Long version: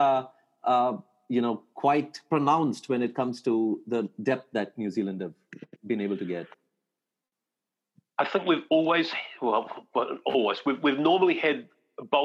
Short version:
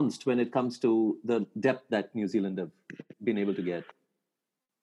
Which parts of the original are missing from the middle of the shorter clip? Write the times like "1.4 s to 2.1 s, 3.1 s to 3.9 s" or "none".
none